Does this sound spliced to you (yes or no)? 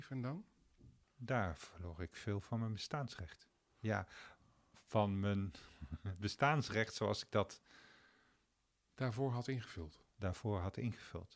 yes